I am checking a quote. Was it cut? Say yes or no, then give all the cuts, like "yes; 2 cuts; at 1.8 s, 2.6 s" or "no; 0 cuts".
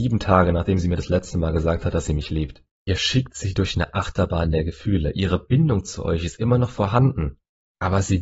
no; 0 cuts